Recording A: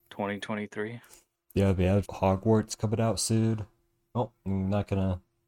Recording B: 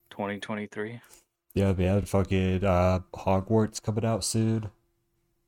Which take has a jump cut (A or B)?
A